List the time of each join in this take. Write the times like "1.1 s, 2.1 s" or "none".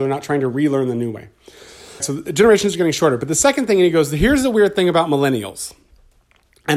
2.0 s